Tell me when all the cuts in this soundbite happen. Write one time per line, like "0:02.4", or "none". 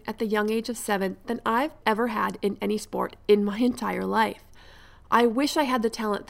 0:01.8